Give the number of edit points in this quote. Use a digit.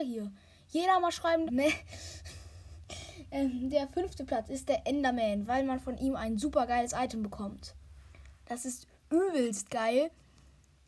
3